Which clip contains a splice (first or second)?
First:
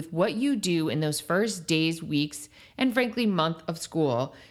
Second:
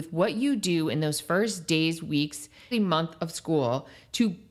second